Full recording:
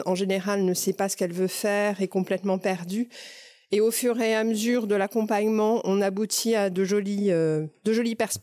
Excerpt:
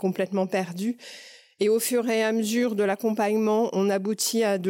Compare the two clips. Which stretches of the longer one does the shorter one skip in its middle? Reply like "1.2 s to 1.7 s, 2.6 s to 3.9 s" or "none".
none